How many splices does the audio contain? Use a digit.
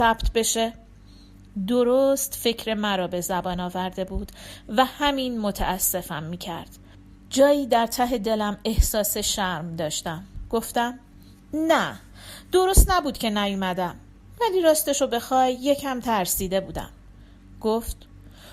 0